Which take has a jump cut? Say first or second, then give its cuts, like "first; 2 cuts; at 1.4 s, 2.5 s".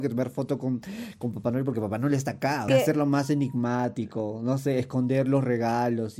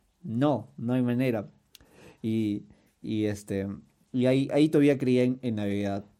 first; 1 cut; at 2.7 s